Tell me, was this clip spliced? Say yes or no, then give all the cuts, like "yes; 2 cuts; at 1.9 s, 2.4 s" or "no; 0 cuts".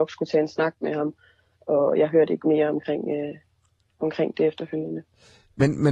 no; 0 cuts